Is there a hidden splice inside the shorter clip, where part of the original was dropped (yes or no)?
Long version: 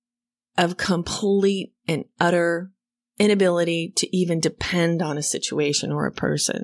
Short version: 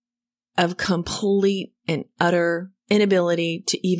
yes